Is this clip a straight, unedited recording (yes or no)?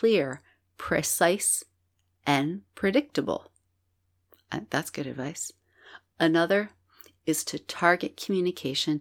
yes